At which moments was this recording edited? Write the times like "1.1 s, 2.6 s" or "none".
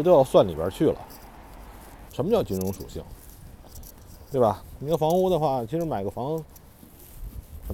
2.1 s